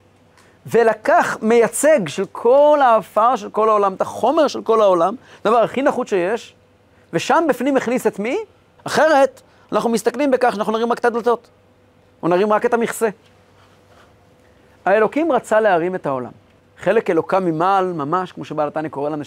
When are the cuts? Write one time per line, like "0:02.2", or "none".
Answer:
0:08.8
0:16.6